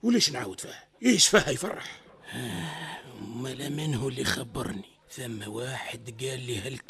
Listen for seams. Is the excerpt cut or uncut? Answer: cut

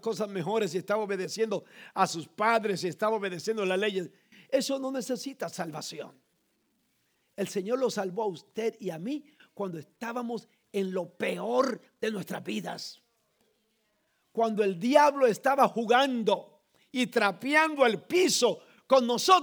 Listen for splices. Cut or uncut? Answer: uncut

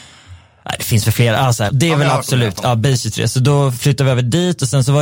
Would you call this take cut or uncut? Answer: cut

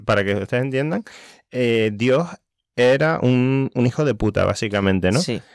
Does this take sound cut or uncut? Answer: uncut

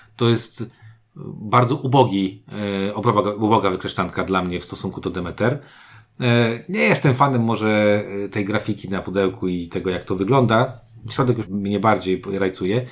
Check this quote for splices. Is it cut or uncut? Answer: cut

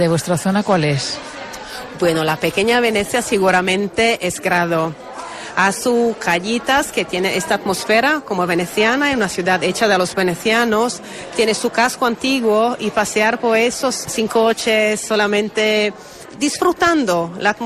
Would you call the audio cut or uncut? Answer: uncut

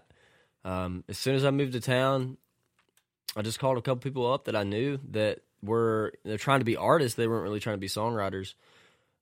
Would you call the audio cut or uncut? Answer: uncut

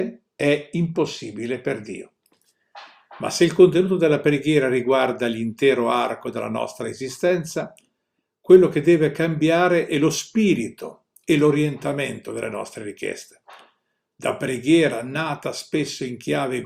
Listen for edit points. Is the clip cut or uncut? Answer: uncut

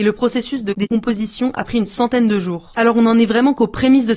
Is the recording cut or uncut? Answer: cut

